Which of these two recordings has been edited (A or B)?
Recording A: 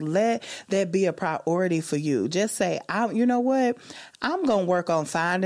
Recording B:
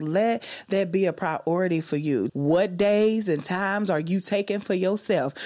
B